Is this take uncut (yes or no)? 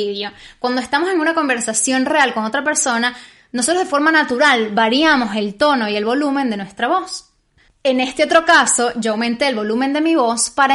no